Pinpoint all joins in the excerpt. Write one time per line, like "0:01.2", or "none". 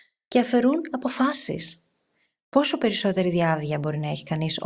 none